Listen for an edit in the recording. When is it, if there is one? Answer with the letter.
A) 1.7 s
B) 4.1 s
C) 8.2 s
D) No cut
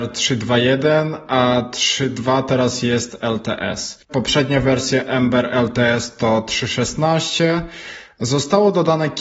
B